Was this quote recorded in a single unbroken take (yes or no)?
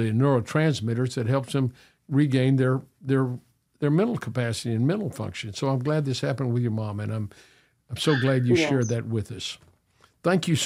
yes